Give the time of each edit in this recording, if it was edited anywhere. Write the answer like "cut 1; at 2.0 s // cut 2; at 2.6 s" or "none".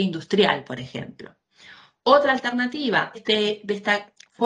cut 1; at 3.1 s